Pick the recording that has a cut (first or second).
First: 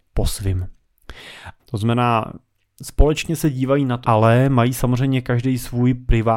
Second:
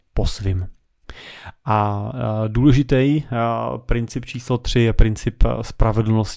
first